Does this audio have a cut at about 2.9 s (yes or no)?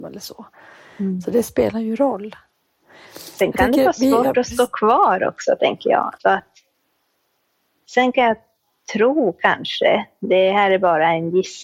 no